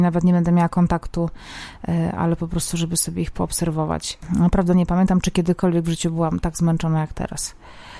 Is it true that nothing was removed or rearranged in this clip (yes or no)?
yes